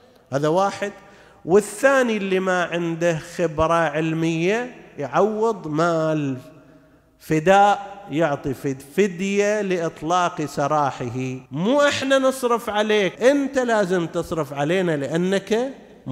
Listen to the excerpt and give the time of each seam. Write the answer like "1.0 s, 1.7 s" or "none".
11.5 s, 13.1 s